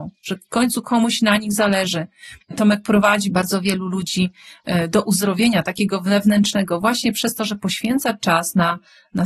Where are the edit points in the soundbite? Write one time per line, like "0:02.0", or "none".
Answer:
0:02.4

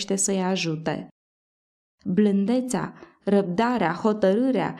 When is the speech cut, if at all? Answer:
none

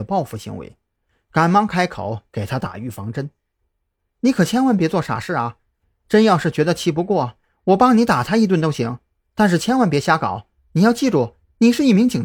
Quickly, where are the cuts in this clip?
none

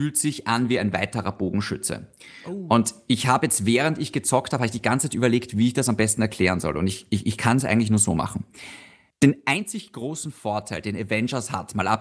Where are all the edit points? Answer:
none

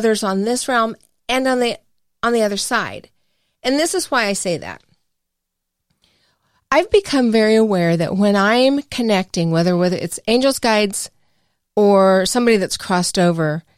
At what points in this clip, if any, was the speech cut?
none

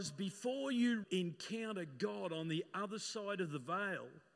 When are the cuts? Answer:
0:01.0

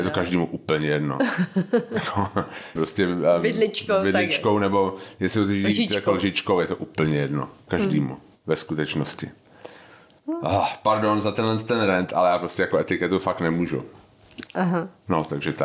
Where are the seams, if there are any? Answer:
0:02.8

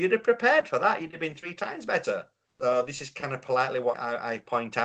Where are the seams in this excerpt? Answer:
0:02.5
0:03.9

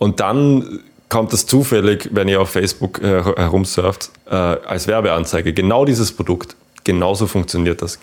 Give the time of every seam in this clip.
0:04.2

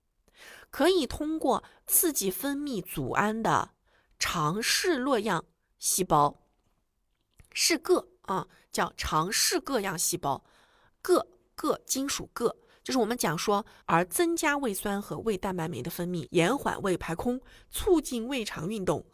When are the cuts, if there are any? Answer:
0:13.8
0:16.3

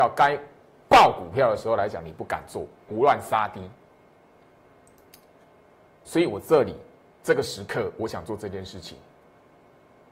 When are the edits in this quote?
0:02.9

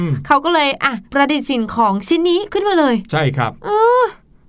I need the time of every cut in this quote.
none

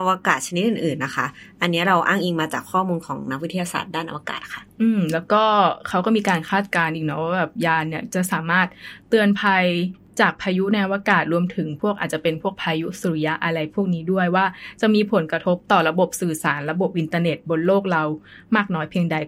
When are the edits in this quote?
none

